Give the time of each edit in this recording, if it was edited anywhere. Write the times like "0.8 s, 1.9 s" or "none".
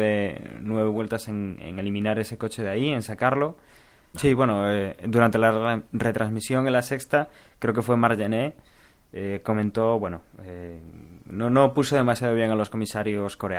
4.1 s